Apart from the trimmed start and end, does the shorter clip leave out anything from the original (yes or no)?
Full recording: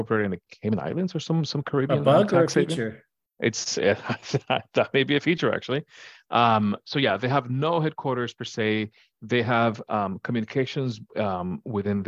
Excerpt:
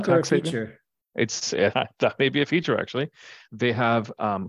yes